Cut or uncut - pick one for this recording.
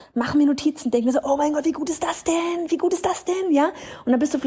uncut